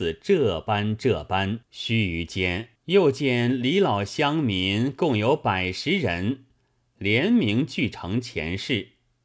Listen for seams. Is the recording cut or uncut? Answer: cut